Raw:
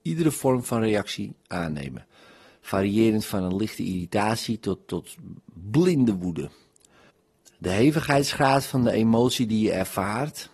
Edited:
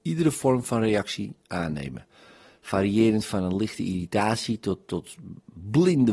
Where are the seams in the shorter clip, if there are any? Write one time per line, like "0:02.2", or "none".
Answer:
none

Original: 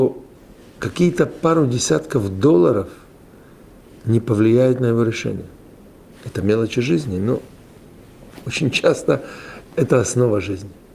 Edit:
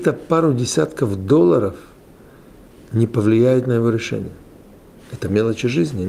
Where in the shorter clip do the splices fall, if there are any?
none

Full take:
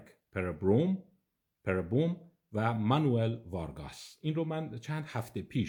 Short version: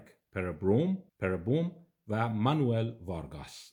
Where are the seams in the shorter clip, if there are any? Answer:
0:01.1

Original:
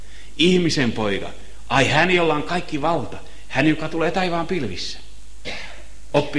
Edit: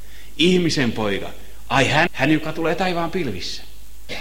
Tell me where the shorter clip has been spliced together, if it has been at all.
0:02.1

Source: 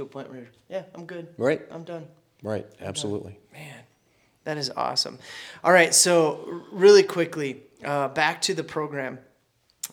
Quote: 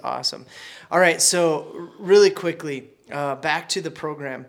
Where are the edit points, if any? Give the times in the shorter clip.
none

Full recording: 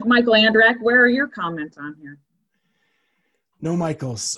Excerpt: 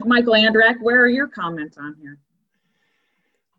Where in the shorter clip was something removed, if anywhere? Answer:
none

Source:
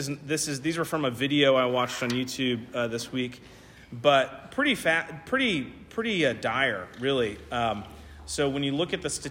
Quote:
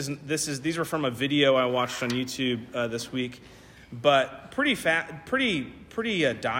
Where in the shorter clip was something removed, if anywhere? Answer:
none

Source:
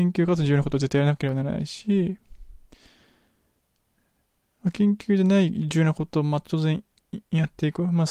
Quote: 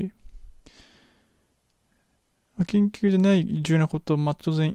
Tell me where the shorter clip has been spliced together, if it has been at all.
none

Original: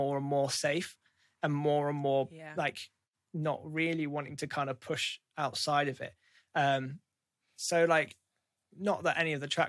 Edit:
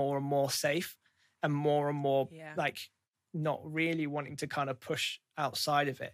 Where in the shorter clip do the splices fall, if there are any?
none

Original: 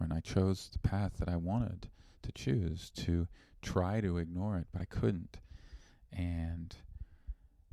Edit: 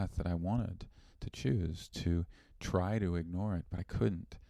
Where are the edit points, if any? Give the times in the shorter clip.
none

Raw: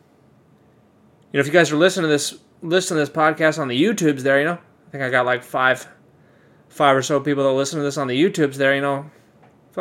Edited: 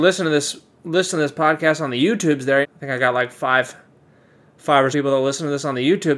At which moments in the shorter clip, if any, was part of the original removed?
0:02.6
0:04.9

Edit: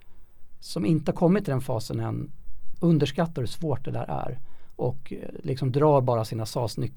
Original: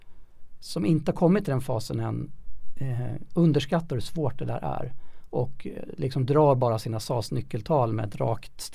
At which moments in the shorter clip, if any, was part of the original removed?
0:02.7

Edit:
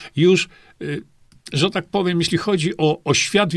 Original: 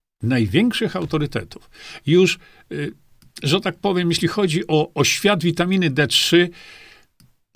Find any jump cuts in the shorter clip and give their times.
none

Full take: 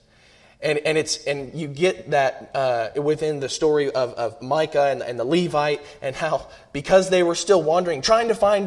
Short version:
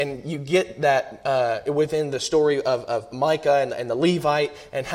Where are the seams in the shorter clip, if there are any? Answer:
none

